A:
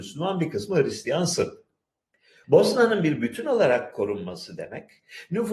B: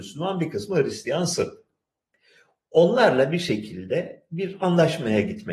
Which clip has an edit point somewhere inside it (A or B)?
A